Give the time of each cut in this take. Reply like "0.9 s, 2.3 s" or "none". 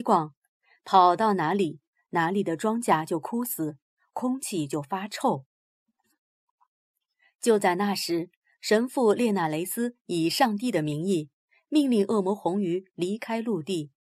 none